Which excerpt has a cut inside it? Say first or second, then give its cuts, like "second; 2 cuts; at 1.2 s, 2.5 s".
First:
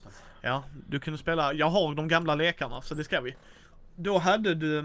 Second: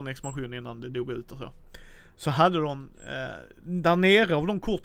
first; 1 cut; at 3.7 s